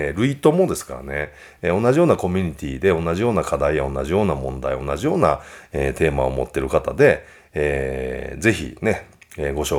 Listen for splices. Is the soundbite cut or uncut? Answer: uncut